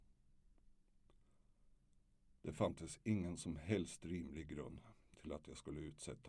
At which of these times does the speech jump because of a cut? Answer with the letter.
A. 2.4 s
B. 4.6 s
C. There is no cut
C